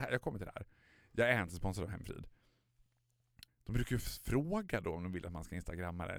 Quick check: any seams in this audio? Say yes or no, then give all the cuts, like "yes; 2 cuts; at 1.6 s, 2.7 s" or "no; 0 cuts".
yes; 1 cut; at 3.5 s